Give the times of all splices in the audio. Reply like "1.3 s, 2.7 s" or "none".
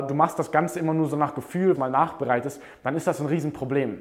1.7 s